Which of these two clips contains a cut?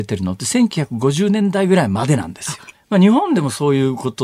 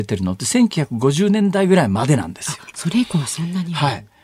first; 1 cut; at 2.7 s

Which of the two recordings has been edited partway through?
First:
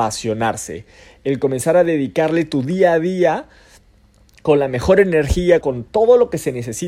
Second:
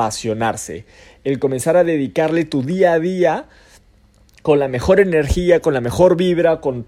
first; 1 cut; at 5.6 s

